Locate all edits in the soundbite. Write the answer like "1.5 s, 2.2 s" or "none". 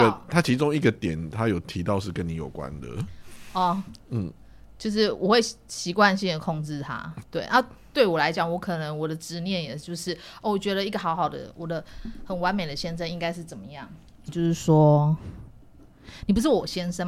7.2 s, 14.3 s